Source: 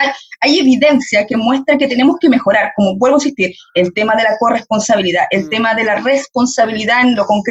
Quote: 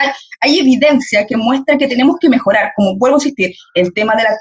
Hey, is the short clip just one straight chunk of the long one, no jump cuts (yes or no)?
yes